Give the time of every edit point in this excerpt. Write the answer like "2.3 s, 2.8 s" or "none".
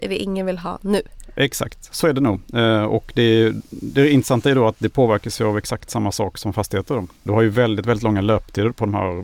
none